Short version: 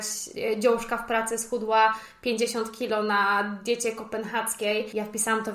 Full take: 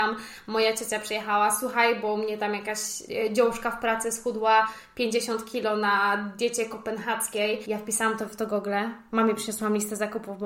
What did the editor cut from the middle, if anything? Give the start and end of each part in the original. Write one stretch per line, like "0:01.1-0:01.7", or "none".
none